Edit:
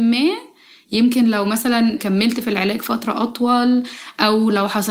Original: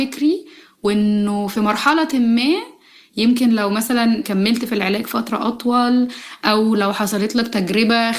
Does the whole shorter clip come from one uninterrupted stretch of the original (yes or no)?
yes